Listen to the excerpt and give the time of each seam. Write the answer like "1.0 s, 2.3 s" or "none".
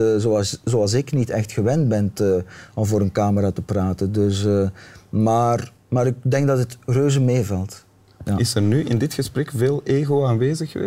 8.2 s

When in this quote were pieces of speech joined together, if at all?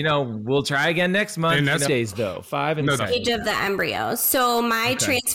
1.9 s, 3.0 s

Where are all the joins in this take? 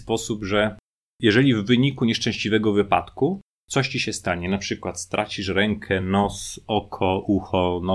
none

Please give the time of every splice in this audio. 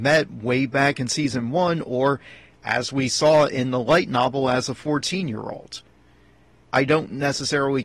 6.6 s

